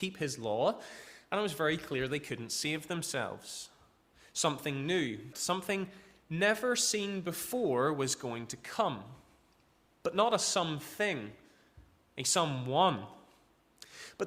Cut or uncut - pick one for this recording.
cut